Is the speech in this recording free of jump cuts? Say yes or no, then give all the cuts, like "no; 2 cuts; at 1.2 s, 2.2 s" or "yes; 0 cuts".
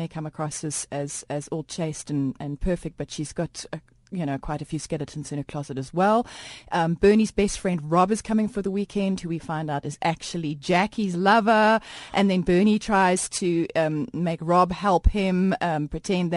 yes; 0 cuts